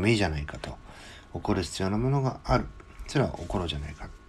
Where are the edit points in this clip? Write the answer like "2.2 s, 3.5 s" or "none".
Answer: none